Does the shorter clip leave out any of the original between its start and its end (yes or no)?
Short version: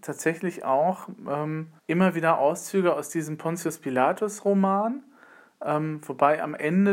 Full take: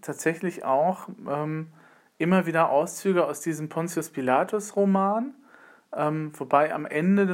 yes